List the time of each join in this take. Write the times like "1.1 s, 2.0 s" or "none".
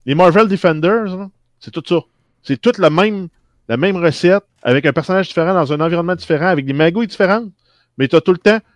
4.5 s